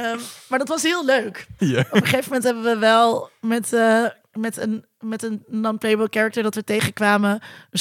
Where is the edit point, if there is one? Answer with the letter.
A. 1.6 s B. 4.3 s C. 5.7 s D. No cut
A